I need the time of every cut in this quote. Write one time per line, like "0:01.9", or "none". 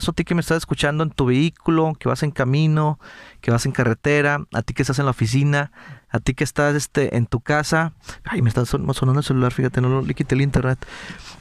none